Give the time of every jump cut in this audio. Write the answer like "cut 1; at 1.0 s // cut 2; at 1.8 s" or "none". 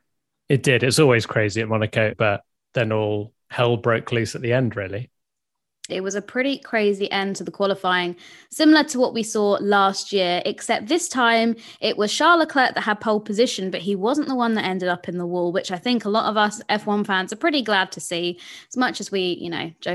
cut 1; at 2.1 s // cut 2; at 5.9 s